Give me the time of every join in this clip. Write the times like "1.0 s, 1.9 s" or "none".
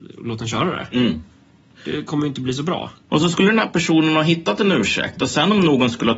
3.1 s